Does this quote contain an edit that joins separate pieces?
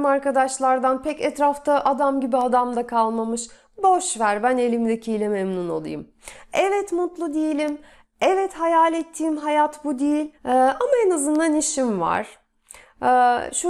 yes; 1 cut; at 10.4 s

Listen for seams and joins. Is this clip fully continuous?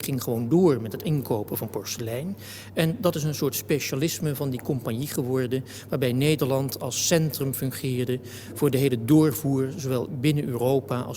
yes; 0 cuts

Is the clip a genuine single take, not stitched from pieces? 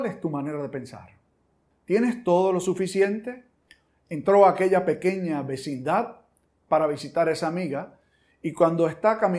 no; 2 cuts; at 1.7 s, 3.9 s

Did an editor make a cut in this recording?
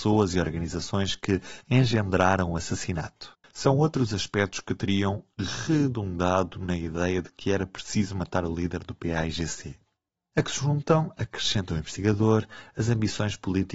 yes; 1 cut; at 3.4 s

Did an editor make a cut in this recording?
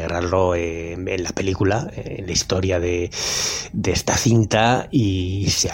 no; 0 cuts

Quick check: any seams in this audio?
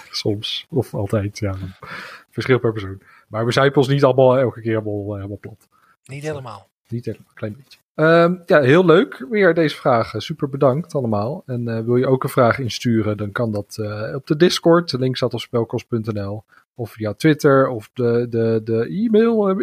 no; 0 cuts

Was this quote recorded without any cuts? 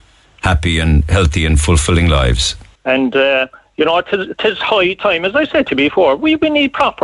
no; 1 cut; at 2.8 s

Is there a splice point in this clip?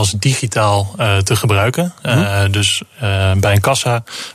no; 0 cuts

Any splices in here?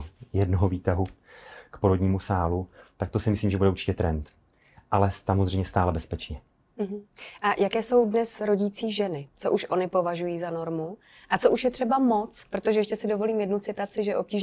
no; 0 cuts

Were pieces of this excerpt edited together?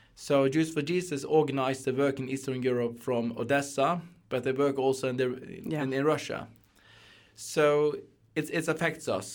no; 0 cuts

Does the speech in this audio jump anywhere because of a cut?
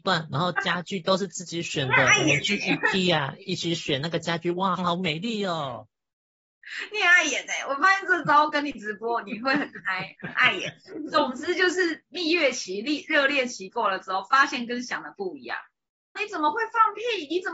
yes; 2 cuts; at 4.8 s, 16.2 s

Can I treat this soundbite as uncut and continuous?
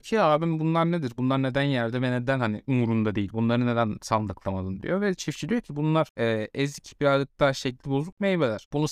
yes; 0 cuts

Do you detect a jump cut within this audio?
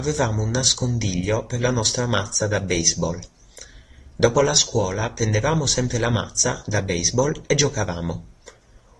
no; 0 cuts

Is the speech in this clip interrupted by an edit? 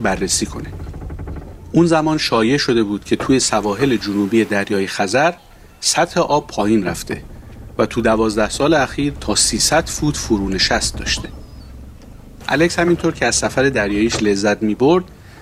yes; 1 cut; at 12.4 s

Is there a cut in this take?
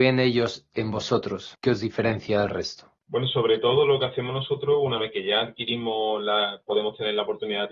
no; 0 cuts

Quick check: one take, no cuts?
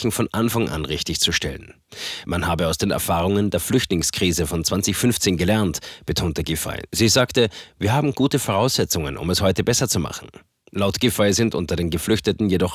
yes; 0 cuts

